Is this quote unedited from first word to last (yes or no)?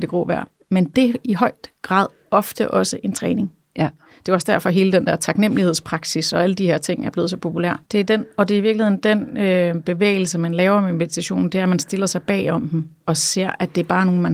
no